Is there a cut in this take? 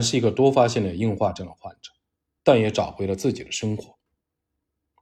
no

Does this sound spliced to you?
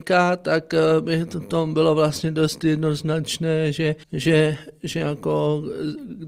yes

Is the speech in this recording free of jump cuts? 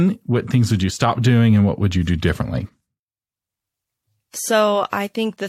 yes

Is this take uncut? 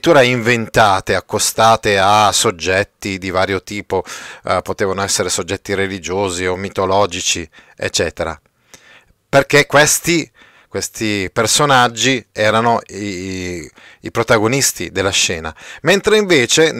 yes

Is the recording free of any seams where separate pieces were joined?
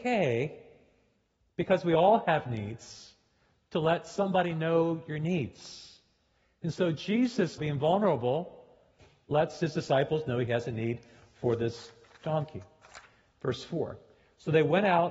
no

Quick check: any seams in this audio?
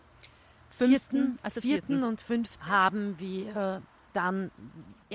yes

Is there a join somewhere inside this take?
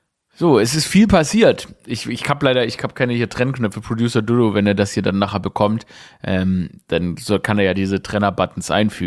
no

